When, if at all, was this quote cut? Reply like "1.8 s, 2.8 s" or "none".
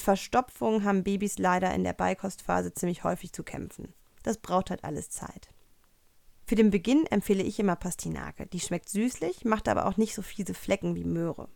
none